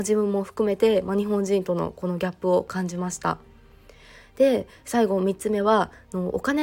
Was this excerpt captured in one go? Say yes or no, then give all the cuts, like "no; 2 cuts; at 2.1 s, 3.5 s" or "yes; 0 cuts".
yes; 0 cuts